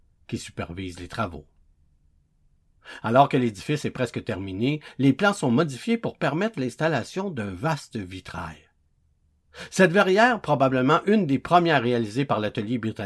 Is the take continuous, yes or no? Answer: yes